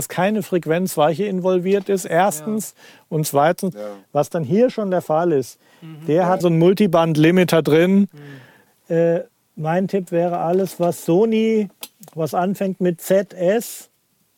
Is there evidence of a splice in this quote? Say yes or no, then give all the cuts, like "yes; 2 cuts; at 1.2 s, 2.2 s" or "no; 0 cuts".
yes; 3 cuts; at 3.7 s, 6.4 s, 8.7 s